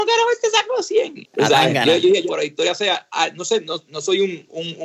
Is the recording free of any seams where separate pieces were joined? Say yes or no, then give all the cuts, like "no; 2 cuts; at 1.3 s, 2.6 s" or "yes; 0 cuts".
no; 2 cuts; at 1.2 s, 2.3 s